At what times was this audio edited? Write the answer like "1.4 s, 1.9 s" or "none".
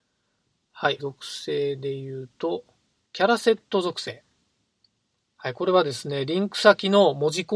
1.0 s